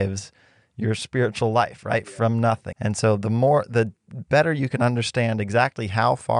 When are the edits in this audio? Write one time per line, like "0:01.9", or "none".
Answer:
0:02.7